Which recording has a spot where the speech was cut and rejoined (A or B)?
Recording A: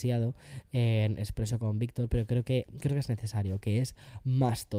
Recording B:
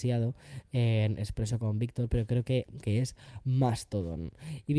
B